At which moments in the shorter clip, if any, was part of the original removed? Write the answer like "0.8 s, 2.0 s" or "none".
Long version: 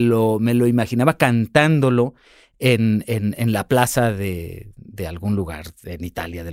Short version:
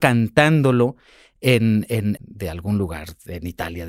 2.2 s